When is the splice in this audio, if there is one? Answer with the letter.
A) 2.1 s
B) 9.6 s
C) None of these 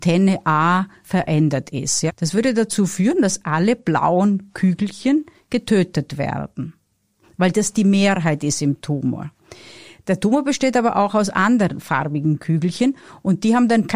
A